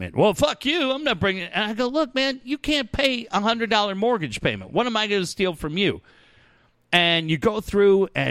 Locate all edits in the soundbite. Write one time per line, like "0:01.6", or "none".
none